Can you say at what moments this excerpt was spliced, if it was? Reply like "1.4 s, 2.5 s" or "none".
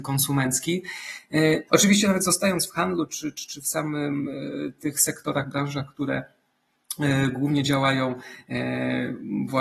1.7 s